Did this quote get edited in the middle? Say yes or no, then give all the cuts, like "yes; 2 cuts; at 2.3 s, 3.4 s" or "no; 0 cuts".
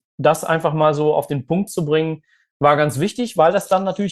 no; 0 cuts